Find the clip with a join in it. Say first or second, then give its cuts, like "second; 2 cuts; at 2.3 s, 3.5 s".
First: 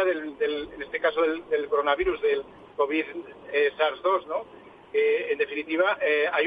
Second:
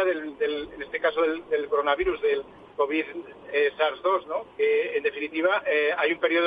second; 1 cut; at 4.5 s